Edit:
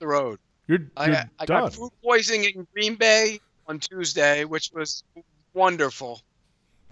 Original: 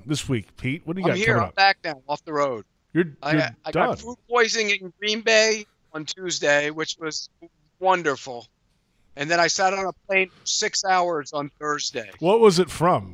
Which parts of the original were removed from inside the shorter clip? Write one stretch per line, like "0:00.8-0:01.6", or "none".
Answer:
none